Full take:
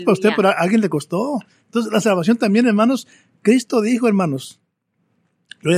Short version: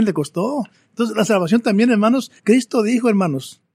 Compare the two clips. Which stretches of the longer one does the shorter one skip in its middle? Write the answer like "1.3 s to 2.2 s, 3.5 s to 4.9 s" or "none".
3.1 s to 3.4 s